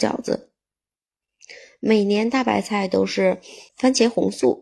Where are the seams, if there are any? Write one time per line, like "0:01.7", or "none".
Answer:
0:03.7